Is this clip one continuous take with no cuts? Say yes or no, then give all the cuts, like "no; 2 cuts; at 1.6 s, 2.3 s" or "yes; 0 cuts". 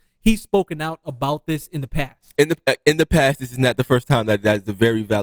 yes; 0 cuts